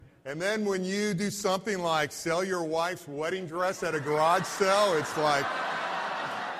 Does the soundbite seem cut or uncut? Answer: uncut